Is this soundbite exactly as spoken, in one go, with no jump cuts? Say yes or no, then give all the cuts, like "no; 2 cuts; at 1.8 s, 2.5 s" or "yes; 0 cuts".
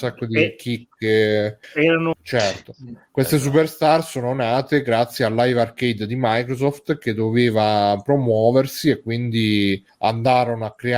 no; 1 cut; at 2.1 s